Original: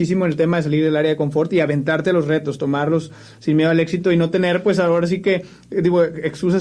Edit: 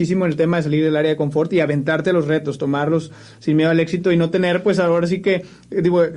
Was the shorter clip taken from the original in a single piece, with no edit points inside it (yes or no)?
yes